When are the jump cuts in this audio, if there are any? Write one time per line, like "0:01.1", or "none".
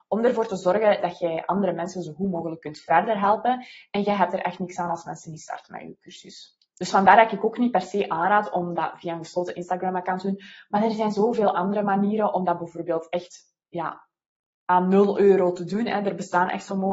0:06.7